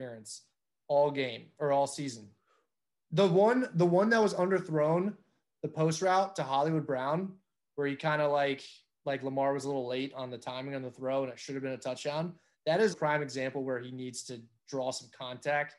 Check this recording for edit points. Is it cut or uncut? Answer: cut